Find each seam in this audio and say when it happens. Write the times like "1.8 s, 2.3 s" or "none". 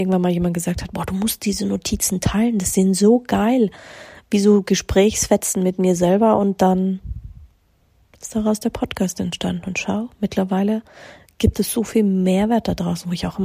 none